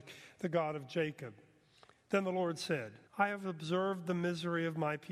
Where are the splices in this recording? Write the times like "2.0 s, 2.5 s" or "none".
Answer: 1.9 s, 3.1 s